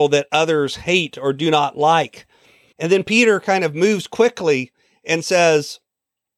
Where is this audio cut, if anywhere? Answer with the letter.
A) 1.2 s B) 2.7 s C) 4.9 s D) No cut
B